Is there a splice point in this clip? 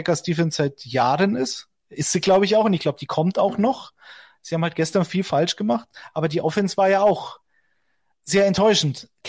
no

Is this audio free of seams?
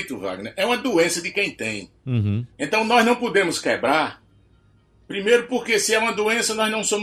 yes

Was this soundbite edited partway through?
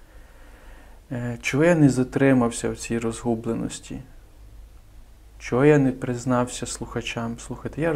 no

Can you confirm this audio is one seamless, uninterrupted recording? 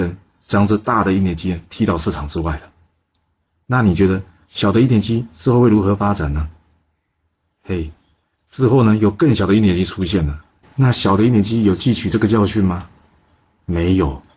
yes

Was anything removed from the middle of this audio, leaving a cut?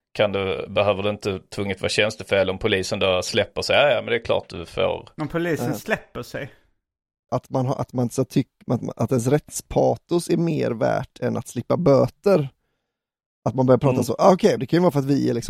yes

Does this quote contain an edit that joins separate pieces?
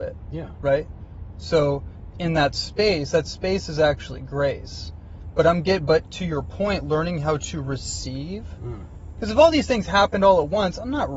no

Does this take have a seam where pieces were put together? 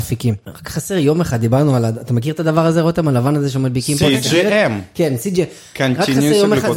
no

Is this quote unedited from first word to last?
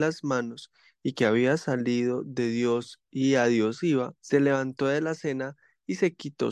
no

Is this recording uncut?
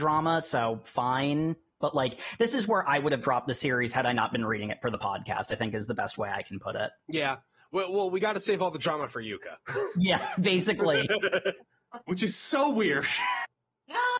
yes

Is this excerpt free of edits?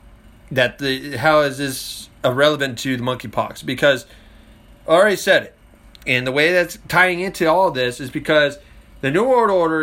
yes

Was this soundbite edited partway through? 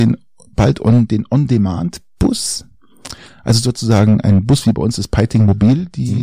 no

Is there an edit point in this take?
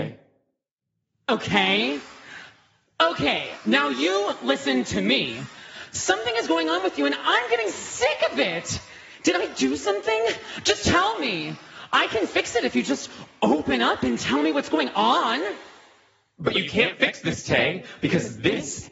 no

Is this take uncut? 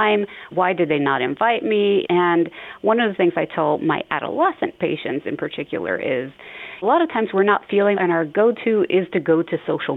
no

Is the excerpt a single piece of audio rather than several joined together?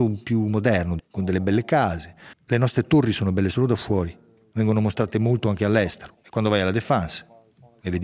no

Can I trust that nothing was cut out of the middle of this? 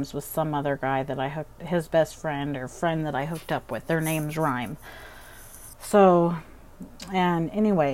yes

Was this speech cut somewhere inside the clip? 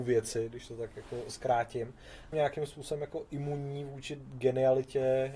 yes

